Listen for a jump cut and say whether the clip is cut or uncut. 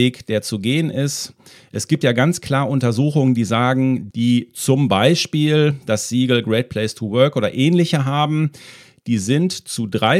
cut